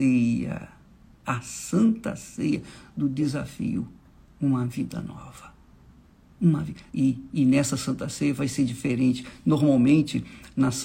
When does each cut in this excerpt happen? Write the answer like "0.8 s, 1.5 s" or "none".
6.9 s